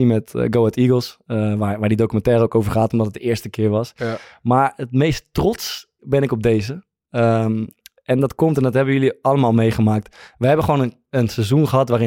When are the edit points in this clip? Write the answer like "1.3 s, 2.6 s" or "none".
6.0 s